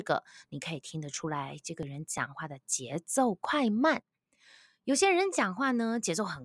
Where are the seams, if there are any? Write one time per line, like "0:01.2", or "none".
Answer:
none

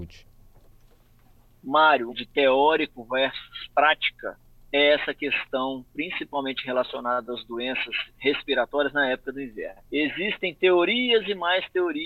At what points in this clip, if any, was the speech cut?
0:02.1
0:09.8

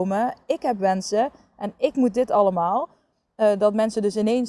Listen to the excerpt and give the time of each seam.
none

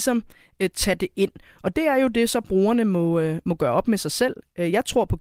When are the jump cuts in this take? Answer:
none

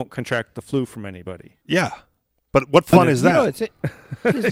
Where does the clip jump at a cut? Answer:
0:01.6

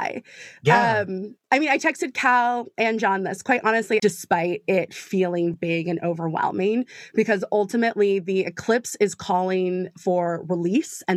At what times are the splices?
0:04.0
0:05.5

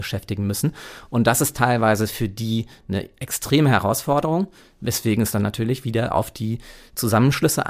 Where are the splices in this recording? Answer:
none

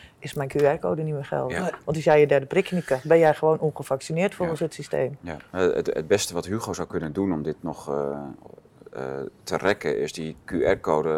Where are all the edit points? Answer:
none

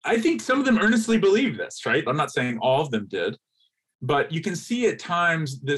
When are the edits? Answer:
0:02.1

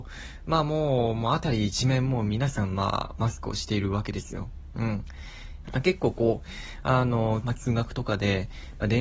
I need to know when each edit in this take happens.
0:05.6
0:07.4

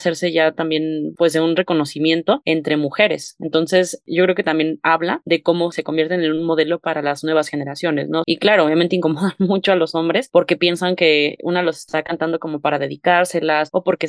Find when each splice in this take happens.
0:08.2

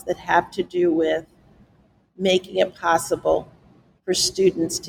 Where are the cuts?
none

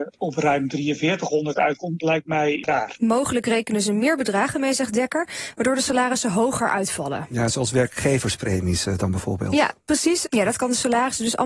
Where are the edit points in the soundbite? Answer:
0:10.2

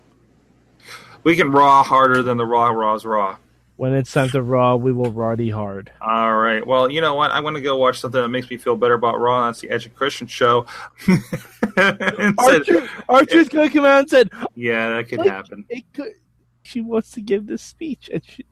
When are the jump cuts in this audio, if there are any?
0:10.9
0:14.5
0:16.7

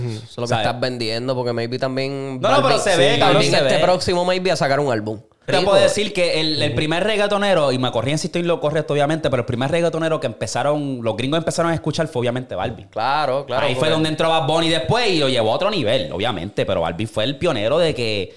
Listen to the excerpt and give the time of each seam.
0:05.5

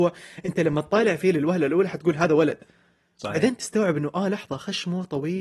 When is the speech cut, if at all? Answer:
none

